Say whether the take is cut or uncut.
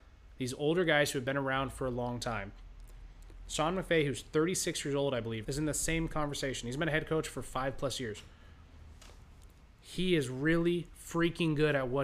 cut